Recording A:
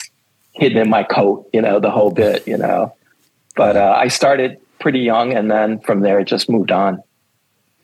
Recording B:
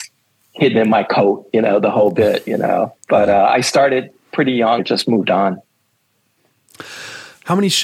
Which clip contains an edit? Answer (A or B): B